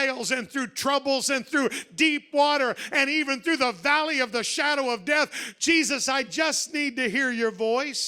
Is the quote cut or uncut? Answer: uncut